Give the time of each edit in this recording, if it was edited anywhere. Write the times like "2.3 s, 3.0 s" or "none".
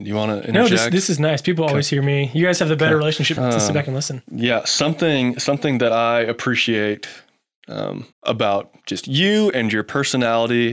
3.4 s, 8.1 s